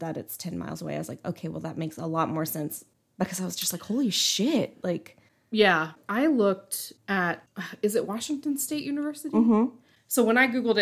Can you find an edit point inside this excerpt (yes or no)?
no